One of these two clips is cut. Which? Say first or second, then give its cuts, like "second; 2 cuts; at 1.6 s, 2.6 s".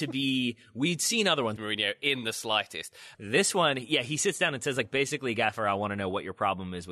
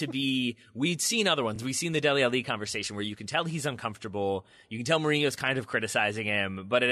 first; 2 cuts; at 1.6 s, 3.1 s